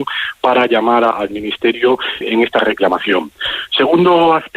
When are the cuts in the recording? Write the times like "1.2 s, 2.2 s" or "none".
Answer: 1.1 s, 2.2 s